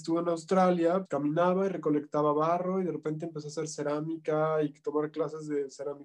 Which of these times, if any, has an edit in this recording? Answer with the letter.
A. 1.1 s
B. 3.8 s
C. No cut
A